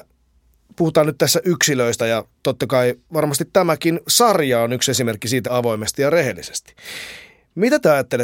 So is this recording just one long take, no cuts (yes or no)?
no